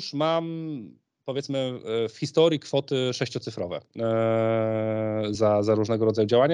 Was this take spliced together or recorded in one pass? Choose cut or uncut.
uncut